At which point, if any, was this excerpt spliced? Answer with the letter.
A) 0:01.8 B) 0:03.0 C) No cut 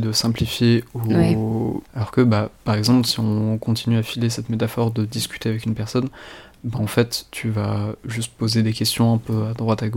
A